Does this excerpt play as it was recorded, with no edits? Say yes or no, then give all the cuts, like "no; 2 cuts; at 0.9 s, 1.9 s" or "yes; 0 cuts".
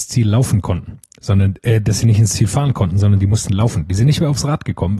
yes; 0 cuts